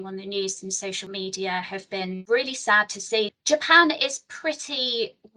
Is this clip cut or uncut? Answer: cut